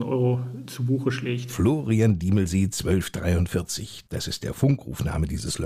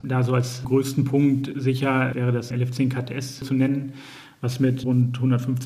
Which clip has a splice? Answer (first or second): second